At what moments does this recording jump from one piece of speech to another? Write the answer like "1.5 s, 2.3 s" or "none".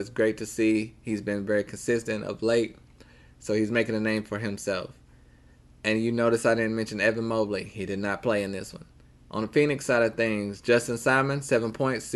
none